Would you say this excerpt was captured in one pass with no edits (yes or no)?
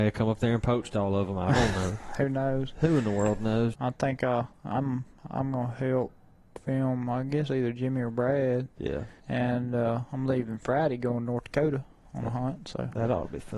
no